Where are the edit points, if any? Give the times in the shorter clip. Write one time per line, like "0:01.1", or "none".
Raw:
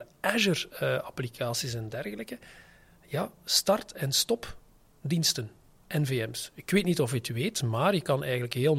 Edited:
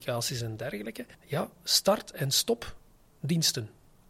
0:01.1